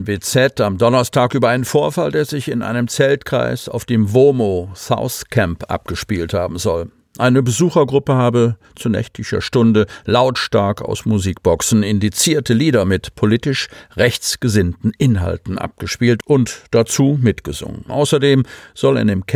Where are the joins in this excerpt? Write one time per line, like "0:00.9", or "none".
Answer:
0:17.9